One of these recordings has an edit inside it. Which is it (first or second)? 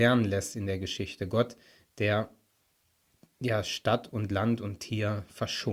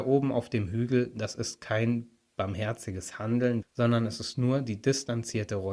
second